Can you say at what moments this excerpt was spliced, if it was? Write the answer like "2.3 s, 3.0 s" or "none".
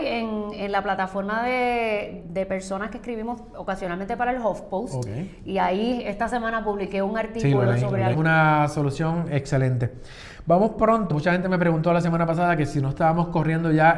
2.2 s, 8.1 s, 11.1 s